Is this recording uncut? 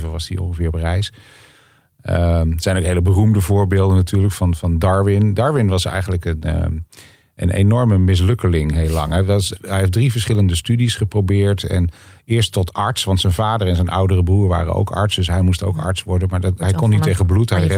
yes; 0 cuts

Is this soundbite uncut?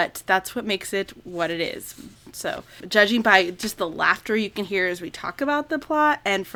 no; 1 cut; at 2.8 s

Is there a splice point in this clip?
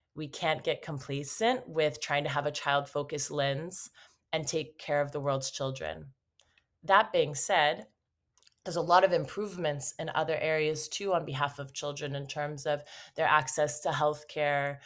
no; 0 cuts

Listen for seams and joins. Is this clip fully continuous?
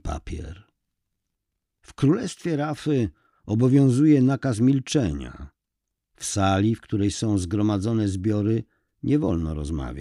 yes; 0 cuts

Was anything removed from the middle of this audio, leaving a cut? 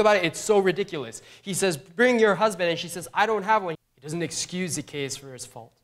yes; 1 cut; at 3.7 s

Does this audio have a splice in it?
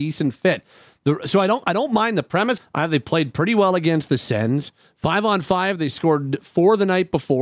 yes; 1 cut; at 2.6 s

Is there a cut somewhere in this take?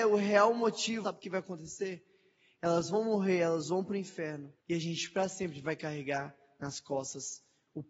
yes; 2 cuts; at 1.0 s, 4.6 s

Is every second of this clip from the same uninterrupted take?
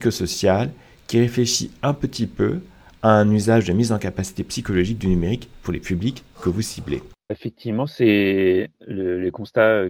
no; 1 cut; at 7.3 s

